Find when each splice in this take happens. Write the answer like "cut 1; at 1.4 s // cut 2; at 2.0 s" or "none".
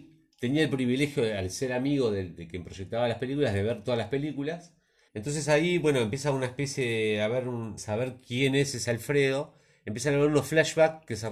cut 1; at 5.1 s // cut 2; at 7.8 s